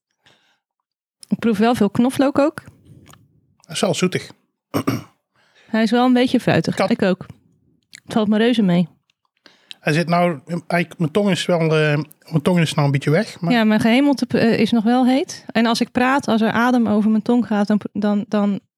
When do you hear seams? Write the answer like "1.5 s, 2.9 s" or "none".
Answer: 6.9 s